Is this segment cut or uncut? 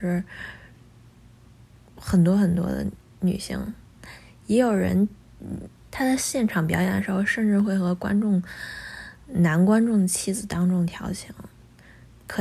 cut